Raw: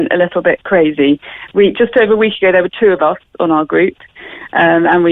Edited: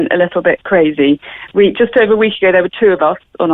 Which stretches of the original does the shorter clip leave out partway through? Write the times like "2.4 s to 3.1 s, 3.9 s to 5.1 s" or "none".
none